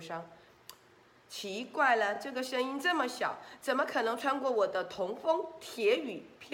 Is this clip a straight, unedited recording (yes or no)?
yes